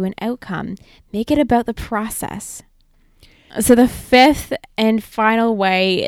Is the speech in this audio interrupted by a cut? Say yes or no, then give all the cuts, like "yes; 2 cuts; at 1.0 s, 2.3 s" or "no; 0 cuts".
yes; 1 cut; at 3.5 s